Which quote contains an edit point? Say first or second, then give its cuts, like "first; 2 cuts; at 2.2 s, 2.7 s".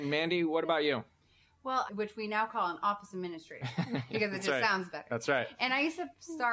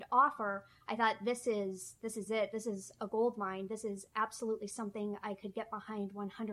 first; 1 cut; at 1.9 s